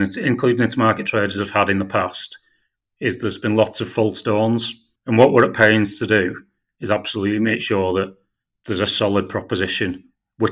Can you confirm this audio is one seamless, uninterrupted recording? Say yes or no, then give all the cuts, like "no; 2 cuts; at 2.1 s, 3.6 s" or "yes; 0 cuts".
no; 1 cut; at 5.0 s